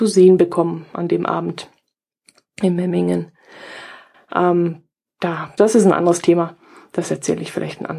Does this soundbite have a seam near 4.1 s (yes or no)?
yes